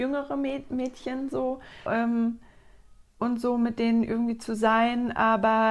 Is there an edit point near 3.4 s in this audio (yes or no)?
no